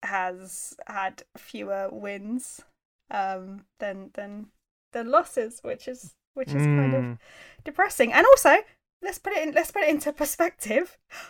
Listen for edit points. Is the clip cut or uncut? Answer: uncut